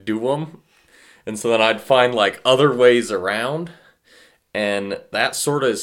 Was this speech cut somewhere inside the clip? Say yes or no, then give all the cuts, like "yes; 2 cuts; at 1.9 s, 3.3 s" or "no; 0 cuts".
no; 0 cuts